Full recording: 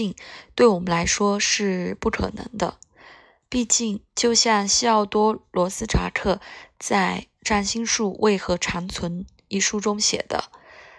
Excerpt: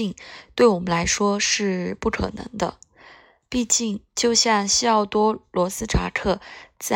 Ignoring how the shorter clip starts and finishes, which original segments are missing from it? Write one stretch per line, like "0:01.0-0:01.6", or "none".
none